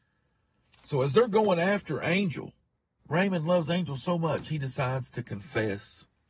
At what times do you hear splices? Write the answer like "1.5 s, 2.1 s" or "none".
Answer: 3.0 s